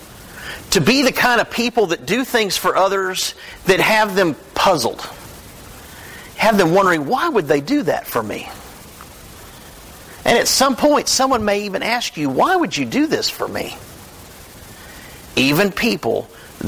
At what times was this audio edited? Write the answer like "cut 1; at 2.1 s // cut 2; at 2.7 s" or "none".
cut 1; at 15.3 s

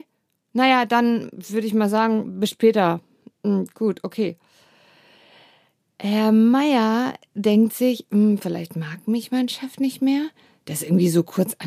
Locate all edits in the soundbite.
none

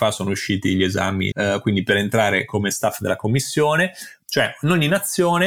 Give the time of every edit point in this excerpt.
cut 1; at 1.3 s // cut 2; at 4.2 s

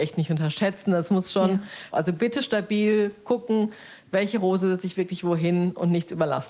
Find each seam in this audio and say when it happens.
cut 1; at 1.9 s

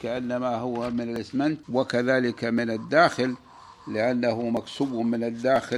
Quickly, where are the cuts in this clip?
cut 1; at 1.6 s

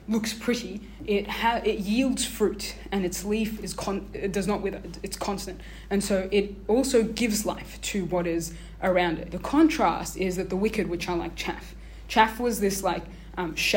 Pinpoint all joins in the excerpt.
cut 1; at 9.3 s

